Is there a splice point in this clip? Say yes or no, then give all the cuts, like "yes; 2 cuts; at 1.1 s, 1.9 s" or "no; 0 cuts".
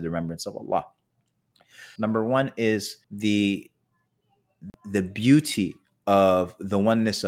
yes; 2 cuts; at 2.0 s, 3.0 s